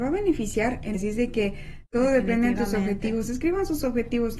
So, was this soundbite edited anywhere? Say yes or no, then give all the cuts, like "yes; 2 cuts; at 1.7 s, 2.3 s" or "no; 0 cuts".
yes; 1 cut; at 0.9 s